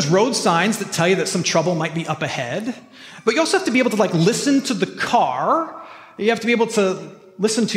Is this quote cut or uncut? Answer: uncut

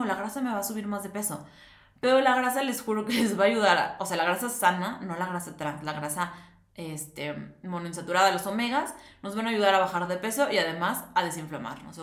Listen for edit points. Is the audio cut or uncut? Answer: uncut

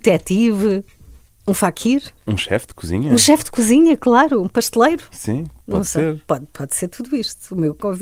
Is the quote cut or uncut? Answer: cut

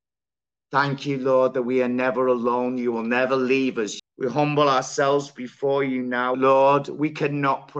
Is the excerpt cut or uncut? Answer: cut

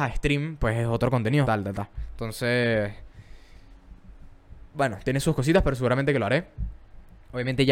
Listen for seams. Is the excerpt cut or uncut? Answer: cut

